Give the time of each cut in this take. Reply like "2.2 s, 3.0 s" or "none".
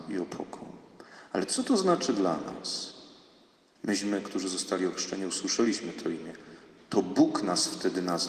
3.8 s